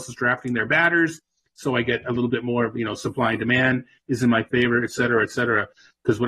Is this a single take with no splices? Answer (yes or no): yes